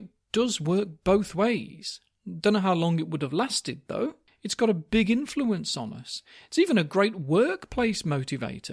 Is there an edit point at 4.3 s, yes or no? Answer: yes